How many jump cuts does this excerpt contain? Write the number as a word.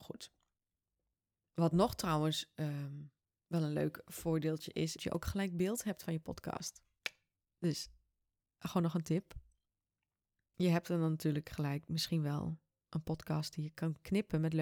one